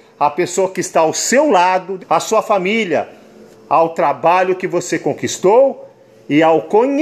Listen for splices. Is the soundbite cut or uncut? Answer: cut